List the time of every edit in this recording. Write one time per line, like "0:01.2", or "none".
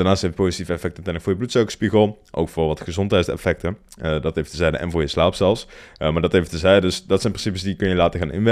none